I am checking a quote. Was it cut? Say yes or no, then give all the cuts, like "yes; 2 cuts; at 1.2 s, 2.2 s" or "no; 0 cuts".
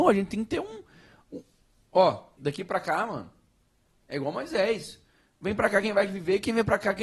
yes; 1 cut; at 2.4 s